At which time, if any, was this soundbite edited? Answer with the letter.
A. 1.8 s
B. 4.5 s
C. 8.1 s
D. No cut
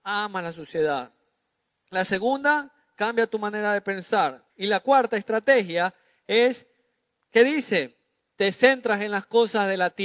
B